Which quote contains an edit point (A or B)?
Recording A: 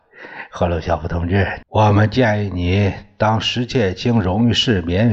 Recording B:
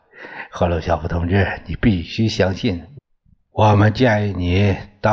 A